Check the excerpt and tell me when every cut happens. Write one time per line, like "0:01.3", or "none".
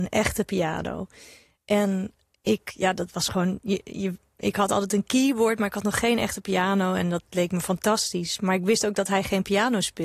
none